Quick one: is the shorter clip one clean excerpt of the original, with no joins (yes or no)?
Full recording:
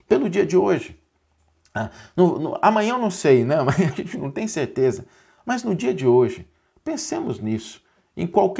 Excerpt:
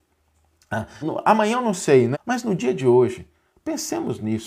no